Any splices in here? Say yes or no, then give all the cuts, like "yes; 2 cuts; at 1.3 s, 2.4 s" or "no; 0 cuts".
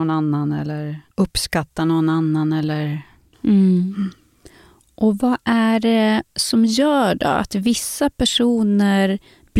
yes; 2 cuts; at 1.1 s, 3.3 s